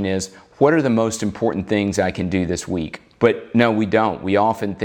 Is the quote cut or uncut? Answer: cut